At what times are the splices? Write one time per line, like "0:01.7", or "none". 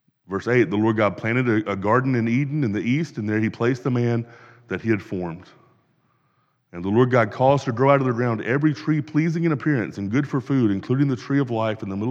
none